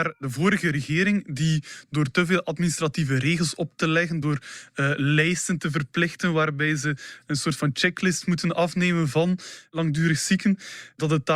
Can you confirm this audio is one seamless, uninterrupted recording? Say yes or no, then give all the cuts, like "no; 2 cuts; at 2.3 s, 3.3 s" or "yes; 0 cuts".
yes; 0 cuts